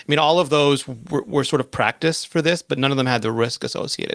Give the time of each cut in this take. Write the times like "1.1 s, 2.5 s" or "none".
none

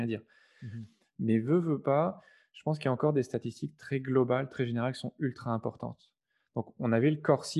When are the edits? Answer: none

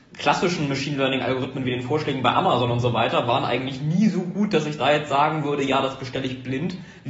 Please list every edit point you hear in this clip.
none

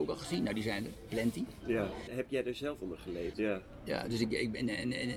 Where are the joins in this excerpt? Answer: 2.1 s, 3.3 s

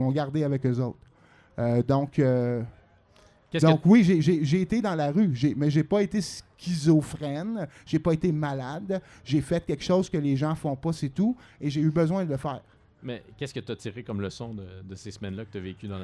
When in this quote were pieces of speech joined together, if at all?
none

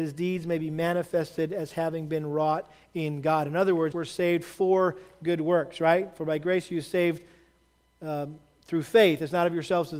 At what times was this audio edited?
3.9 s

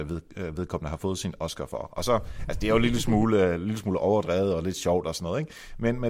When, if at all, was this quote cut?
none

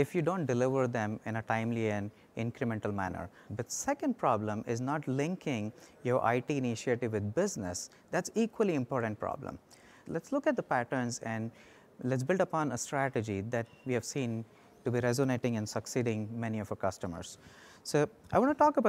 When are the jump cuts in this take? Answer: 3.5 s, 10.1 s

